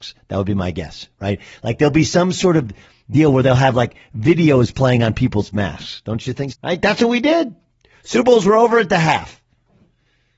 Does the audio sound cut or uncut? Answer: cut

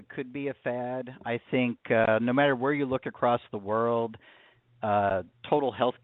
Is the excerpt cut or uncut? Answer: uncut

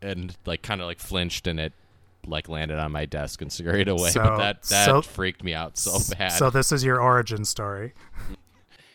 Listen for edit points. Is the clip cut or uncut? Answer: uncut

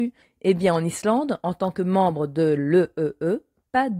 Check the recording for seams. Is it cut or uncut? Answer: uncut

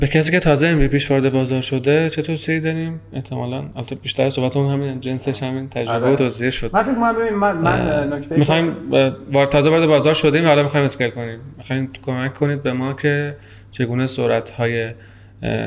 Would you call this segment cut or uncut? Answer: uncut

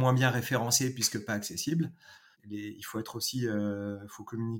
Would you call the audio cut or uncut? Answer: cut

